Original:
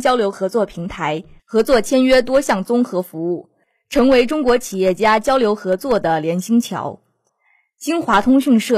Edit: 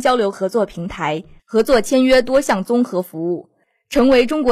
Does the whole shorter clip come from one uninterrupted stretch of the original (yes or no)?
yes